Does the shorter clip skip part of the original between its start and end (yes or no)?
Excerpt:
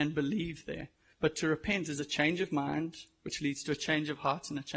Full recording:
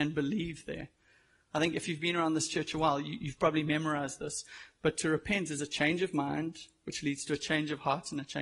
yes